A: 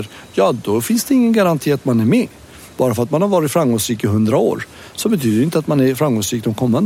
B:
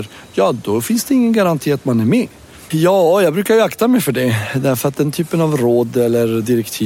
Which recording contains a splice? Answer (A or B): B